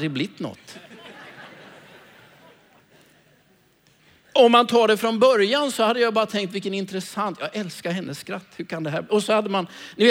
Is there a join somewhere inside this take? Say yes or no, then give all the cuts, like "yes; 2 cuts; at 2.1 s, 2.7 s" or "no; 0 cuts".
no; 0 cuts